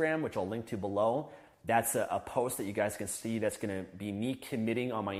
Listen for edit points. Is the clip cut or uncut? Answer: uncut